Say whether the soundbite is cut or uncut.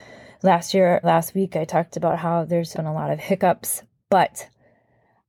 cut